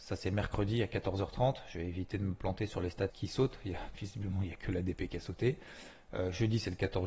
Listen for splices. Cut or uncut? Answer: cut